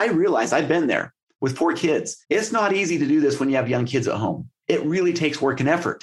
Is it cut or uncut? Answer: cut